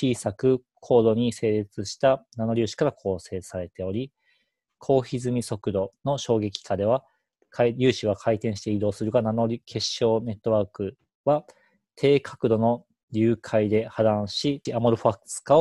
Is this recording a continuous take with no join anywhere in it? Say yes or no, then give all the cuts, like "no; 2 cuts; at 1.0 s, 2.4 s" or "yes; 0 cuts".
no; 1 cut; at 14.7 s